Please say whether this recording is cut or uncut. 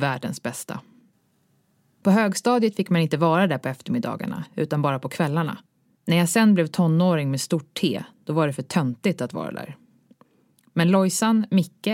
uncut